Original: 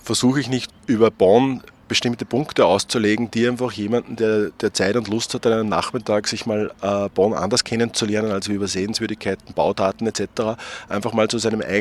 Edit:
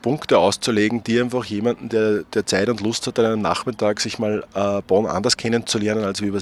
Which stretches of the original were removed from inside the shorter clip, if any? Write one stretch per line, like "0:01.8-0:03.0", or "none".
none